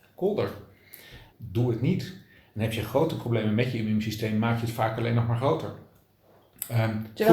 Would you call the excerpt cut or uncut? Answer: cut